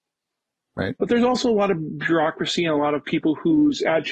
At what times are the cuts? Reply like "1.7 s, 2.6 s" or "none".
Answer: 1.0 s